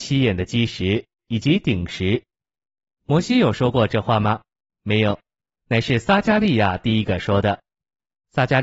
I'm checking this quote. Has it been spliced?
no; 0 cuts

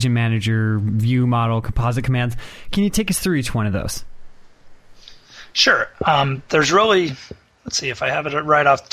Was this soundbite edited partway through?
no; 0 cuts

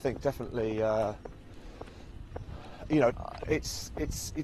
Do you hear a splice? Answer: yes; 1 cut; at 3.1 s

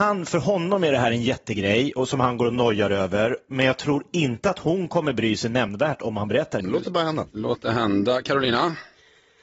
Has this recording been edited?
yes; 1 cut; at 6.6 s

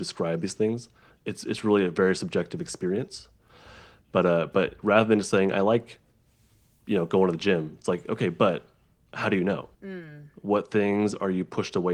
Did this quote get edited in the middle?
yes; 1 cut; at 9.7 s

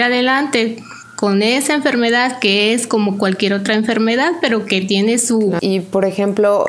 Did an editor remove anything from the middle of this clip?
yes; 1 cut; at 5.6 s

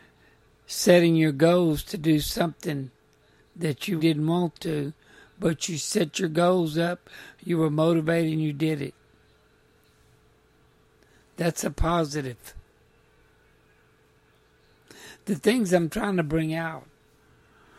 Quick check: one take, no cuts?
no; 1 cut; at 4.0 s

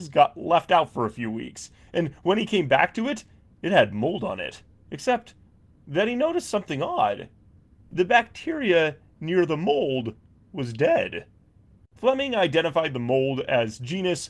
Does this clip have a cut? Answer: yes; 1 cut; at 4.8 s

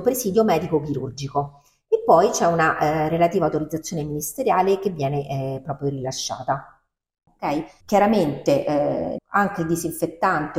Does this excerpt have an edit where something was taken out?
yes; 2 cuts; at 7.8 s, 9.2 s

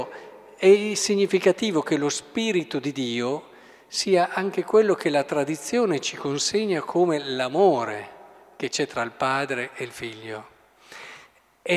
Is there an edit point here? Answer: no; 0 cuts

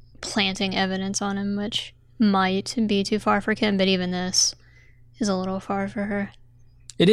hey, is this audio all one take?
yes; 0 cuts

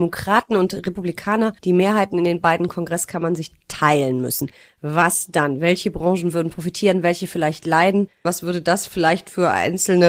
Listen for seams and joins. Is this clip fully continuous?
no; 2 cuts; at 1.6 s, 8.3 s

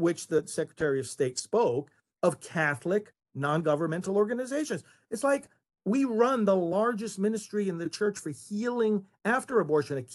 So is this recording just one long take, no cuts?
yes; 0 cuts

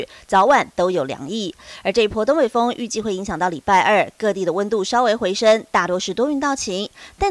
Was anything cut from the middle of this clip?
no; 0 cuts

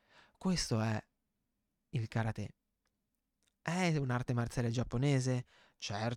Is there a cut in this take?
no; 0 cuts

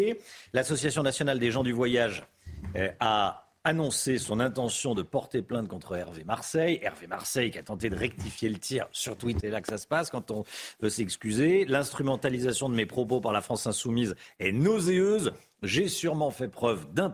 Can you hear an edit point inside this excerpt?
yes; 1 cut; at 9.4 s

